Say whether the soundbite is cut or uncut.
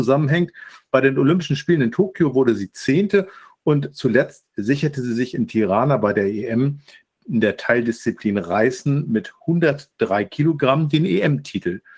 uncut